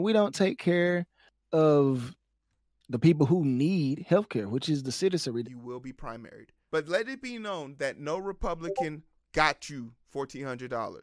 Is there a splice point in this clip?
yes; 2 cuts; at 5.4 s, 6.7 s

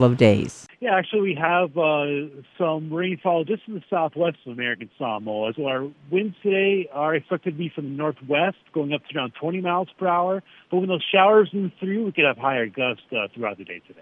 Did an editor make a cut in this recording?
yes; 1 cut; at 5.5 s

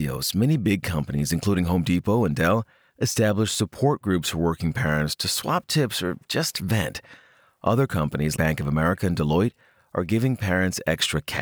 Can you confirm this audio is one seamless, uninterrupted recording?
no; 1 cut; at 8.4 s

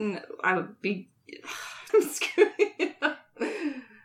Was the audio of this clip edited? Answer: yes; 1 cut; at 1.9 s

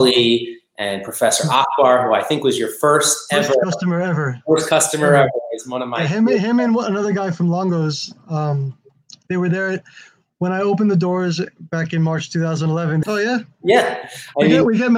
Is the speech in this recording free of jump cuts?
no; 1 cut; at 13.0 s

